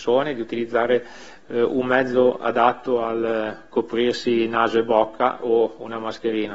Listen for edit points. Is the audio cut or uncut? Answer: uncut